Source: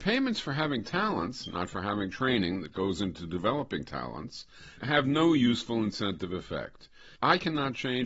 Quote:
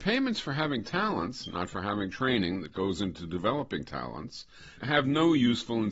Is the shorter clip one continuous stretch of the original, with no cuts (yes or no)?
yes